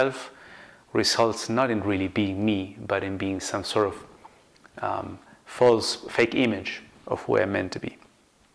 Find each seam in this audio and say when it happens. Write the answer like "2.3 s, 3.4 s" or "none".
none